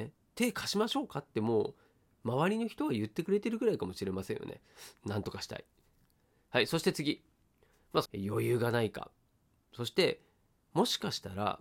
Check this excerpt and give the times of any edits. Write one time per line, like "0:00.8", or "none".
0:05.0
0:08.1